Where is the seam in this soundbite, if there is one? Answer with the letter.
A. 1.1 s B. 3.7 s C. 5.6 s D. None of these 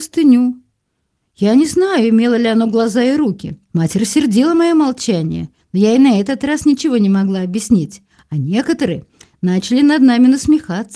B